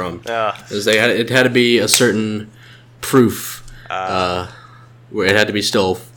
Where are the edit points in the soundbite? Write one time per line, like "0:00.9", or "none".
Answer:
none